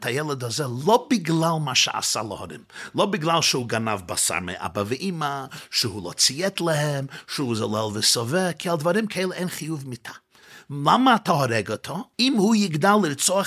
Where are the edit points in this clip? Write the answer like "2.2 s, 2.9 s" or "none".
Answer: 12.1 s